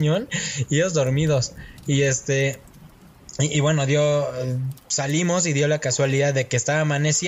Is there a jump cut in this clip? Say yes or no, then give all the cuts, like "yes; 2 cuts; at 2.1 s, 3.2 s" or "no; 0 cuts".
no; 0 cuts